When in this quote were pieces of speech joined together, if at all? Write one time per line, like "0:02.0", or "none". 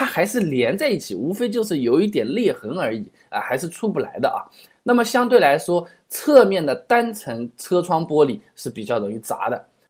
none

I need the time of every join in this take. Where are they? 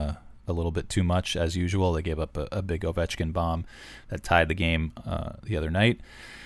none

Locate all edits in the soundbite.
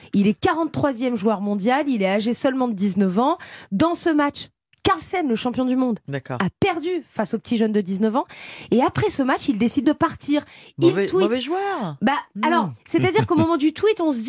0:09.8

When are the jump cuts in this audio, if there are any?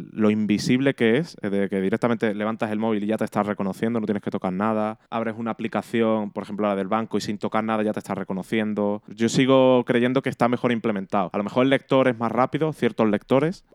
0:05.1

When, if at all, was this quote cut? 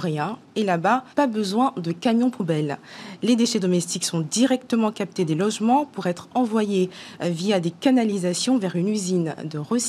0:01.1

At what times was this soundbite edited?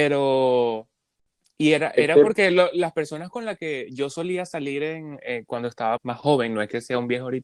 0:06.0

